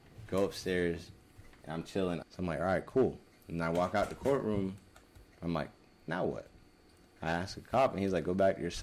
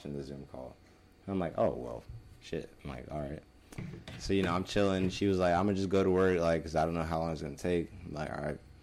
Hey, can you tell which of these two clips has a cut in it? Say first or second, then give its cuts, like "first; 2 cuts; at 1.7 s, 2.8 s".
first; 1 cut; at 2.2 s